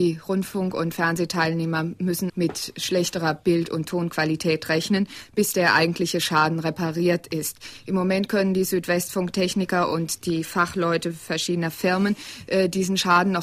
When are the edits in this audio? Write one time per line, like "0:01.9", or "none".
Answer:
0:02.3